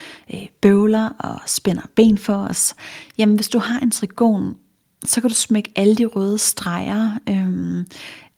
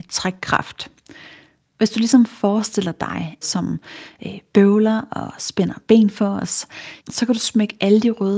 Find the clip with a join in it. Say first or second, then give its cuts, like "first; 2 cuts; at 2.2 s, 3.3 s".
second; 2 cuts; at 3.4 s, 7.0 s